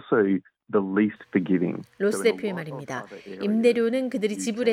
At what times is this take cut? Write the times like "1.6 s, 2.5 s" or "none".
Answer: none